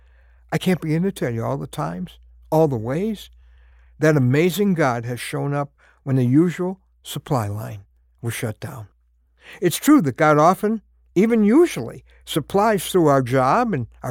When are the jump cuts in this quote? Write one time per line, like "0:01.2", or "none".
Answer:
none

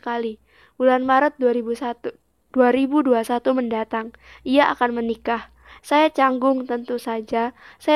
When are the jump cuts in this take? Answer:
0:05.8

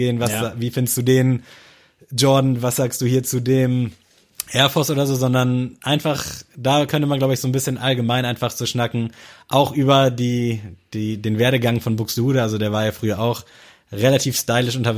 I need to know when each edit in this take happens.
none

